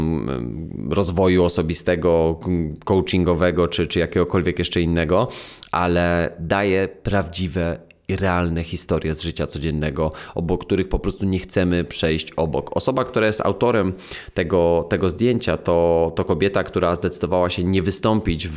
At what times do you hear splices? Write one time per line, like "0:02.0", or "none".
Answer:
none